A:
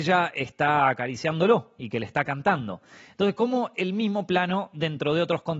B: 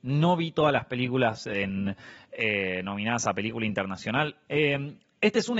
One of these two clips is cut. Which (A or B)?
B